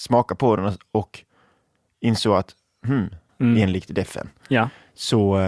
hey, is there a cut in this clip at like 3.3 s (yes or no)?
yes